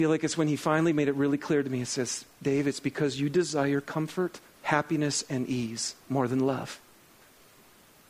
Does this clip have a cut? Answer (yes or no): yes